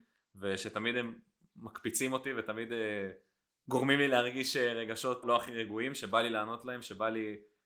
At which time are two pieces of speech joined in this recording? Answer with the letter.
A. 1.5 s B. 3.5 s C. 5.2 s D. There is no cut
C